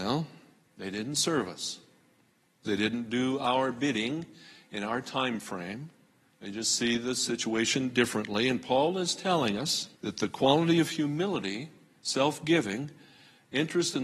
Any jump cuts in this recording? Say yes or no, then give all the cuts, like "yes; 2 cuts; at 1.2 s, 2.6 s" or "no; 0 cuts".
yes; 3 cuts; at 2.6 s, 6.3 s, 9.9 s